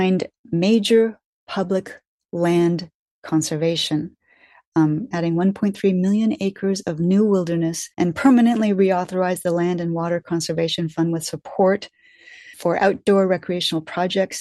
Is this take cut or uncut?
cut